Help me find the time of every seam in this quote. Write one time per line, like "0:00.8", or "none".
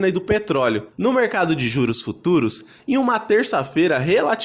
0:00.9